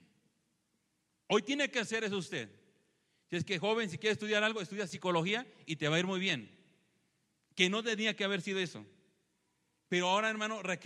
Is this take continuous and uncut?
yes; 0 cuts

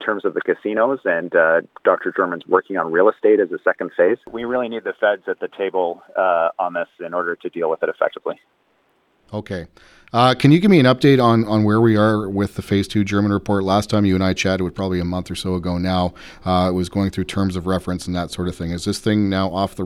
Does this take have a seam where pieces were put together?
no; 0 cuts

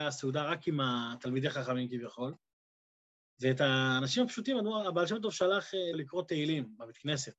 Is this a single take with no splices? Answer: no; 1 cut; at 5.9 s

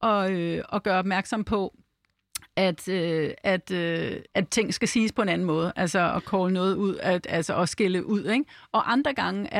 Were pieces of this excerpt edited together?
yes; 1 cut; at 4.3 s

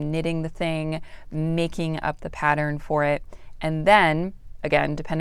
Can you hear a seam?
no; 0 cuts

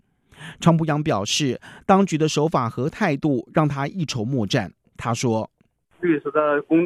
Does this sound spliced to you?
no; 0 cuts

